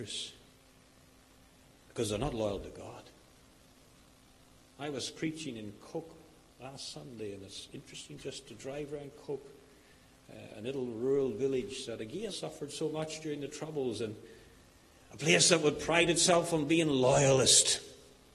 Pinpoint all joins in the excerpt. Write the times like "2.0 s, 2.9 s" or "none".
4.7 s, 12.3 s